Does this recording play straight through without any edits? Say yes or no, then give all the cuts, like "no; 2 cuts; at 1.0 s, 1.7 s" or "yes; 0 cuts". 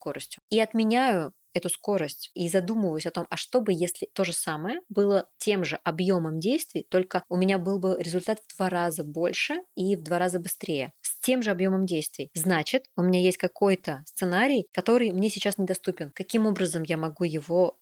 no; 1 cut; at 5.3 s